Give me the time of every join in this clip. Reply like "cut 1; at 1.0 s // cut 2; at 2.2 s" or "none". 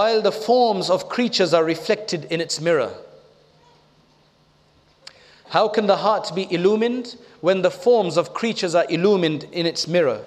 none